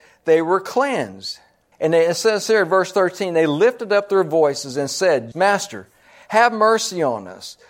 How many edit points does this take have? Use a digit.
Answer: 2